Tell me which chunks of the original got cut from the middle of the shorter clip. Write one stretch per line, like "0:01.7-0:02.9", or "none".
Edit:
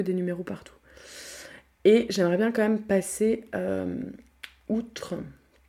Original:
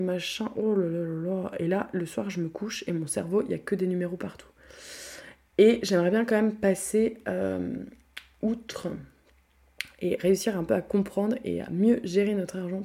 none